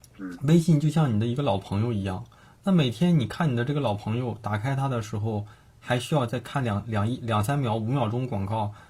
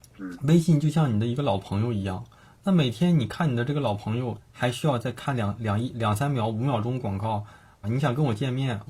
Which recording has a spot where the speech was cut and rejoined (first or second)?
second